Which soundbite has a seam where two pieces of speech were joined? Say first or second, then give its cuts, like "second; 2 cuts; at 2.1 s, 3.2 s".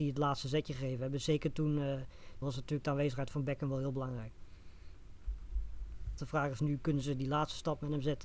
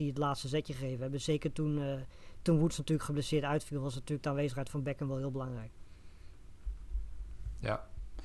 first; 2 cuts; at 2.4 s, 6.2 s